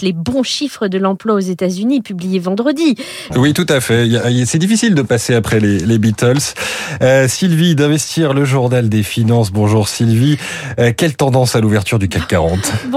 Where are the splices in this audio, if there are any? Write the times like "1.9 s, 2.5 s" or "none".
3.3 s